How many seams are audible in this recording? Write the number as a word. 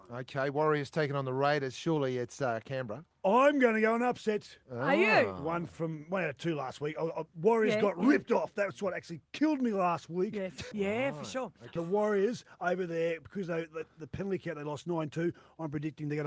two